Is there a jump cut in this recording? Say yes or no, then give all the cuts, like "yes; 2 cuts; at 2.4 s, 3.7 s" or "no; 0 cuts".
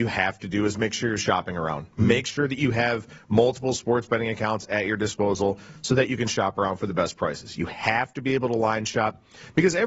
no; 0 cuts